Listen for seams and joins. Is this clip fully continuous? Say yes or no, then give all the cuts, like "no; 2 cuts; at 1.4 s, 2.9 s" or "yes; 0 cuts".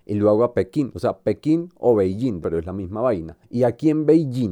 no; 1 cut; at 2.4 s